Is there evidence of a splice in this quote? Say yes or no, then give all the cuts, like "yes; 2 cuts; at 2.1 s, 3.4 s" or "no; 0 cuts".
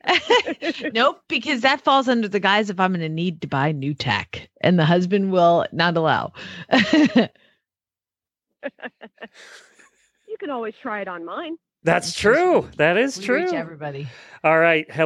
yes; 1 cut; at 11.8 s